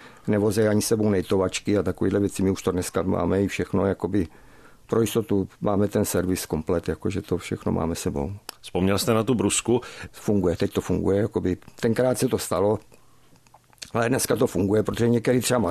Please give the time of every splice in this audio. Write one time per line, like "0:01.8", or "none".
0:10.1